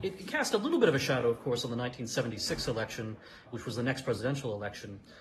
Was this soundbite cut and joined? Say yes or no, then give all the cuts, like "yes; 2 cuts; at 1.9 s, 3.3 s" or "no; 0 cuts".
no; 0 cuts